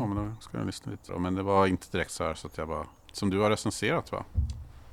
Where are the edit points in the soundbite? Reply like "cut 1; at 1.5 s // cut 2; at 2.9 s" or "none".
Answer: cut 1; at 1.1 s // cut 2; at 3.1 s